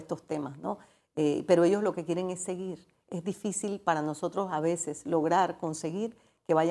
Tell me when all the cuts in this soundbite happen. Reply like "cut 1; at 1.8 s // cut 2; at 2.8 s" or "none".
none